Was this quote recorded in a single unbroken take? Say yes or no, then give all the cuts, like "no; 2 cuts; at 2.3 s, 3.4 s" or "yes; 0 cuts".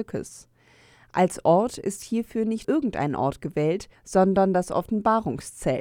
no; 1 cut; at 2.6 s